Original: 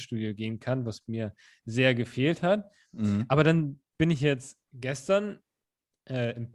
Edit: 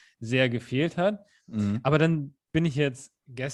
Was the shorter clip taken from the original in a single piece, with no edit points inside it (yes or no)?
yes